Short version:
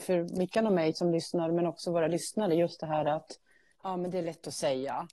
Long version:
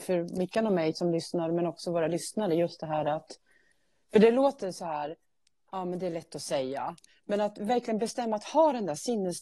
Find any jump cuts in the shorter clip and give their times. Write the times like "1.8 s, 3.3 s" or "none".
3.8 s